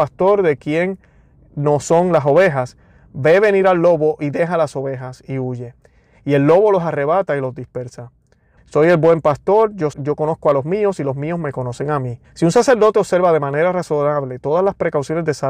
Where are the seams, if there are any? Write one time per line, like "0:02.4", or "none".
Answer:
0:08.6
0:09.9
0:12.2